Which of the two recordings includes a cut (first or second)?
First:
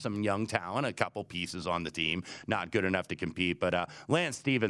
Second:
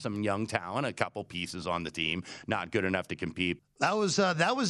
second